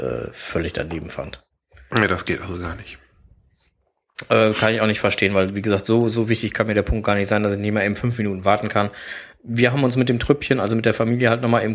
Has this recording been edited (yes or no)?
no